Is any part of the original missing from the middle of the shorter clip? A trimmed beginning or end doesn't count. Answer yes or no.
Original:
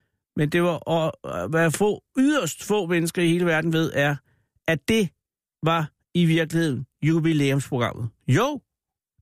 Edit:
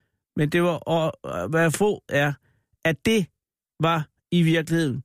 yes